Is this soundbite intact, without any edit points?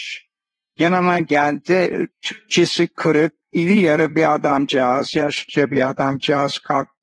no; 1 cut; at 2.1 s

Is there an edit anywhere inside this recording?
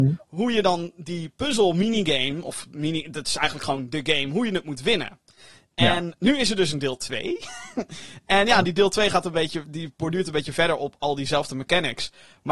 no; 0 cuts

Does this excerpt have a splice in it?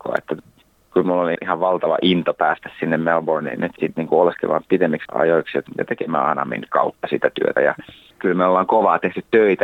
yes; 2 cuts; at 1.4 s, 7.6 s

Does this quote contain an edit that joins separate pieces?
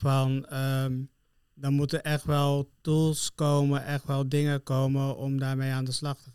no; 0 cuts

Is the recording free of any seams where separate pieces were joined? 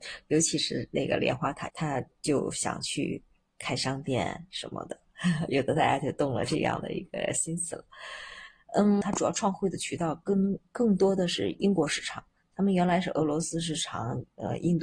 no; 2 cuts; at 1.7 s, 9.0 s

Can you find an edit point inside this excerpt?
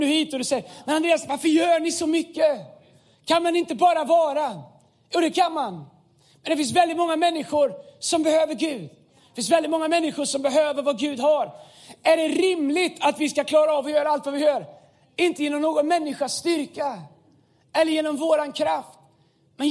no; 0 cuts

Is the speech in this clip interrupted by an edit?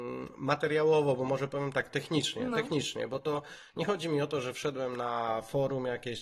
no; 0 cuts

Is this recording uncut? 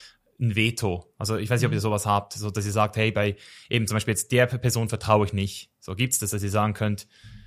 yes; 0 cuts

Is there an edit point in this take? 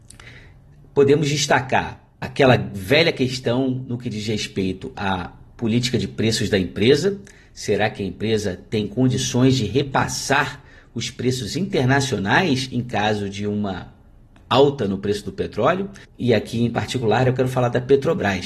yes; 2 cuts; at 2.1 s, 16.0 s

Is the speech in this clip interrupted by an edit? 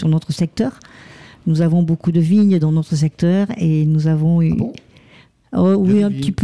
no; 0 cuts

